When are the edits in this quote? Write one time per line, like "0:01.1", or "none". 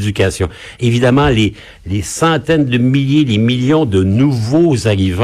none

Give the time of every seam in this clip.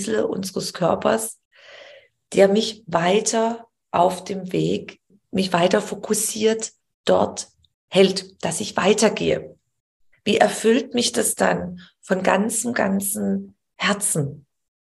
0:05.2
0:10.1

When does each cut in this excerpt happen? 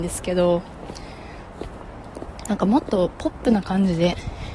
none

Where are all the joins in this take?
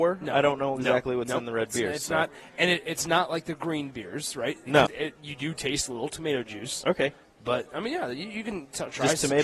0:04.9

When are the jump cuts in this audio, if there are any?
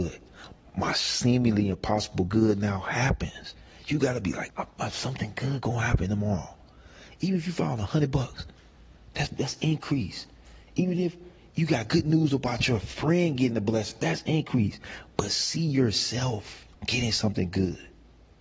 0:04.5
0:16.7

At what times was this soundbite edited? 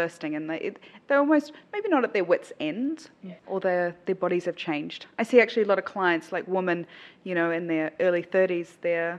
0:03.4

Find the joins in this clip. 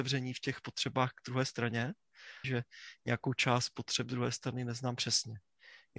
0:02.4

